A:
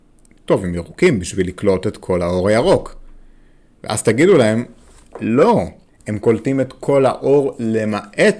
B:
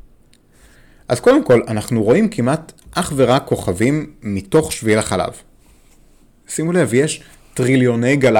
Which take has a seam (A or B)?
A